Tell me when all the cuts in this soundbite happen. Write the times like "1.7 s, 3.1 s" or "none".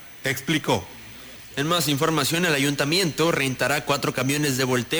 none